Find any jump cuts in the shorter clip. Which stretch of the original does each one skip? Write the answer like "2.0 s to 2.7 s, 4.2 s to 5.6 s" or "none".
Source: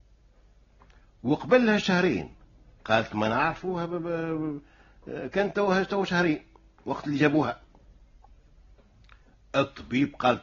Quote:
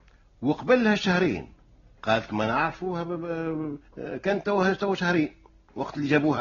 4.7 s to 5.0 s